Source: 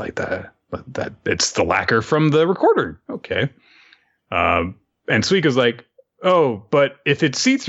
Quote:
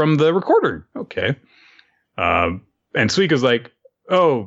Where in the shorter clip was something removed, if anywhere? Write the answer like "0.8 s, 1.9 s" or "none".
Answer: none